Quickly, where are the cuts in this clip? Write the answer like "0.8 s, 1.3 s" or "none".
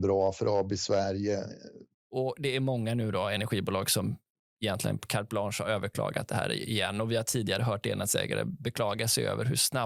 1.9 s

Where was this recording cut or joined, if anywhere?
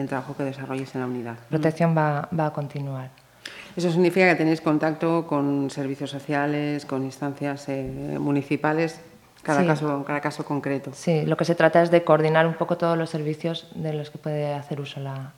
1.5 s

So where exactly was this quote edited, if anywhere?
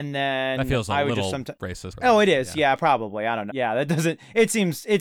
1.9 s, 3.5 s

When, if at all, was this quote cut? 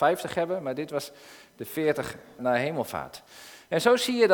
2.4 s

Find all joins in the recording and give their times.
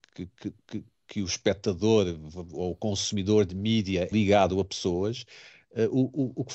4.1 s

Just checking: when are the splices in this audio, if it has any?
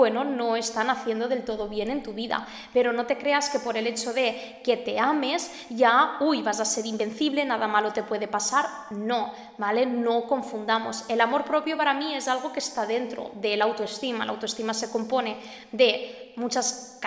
none

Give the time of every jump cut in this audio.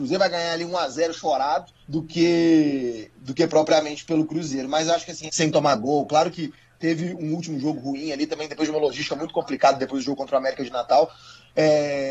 1.8 s, 5.3 s

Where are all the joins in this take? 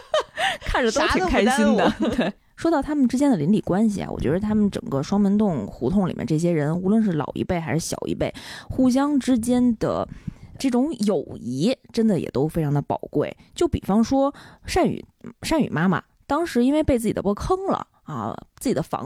10.6 s, 17.2 s

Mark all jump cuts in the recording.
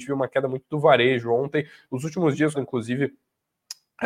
2.5 s

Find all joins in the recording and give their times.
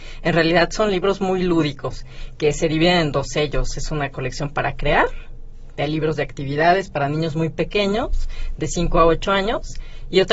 none

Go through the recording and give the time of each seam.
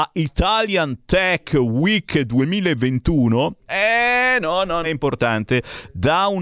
3.7 s, 4.8 s

